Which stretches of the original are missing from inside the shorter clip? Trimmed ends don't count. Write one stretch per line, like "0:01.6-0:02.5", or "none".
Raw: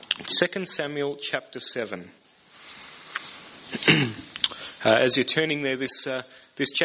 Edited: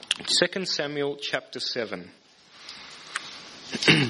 none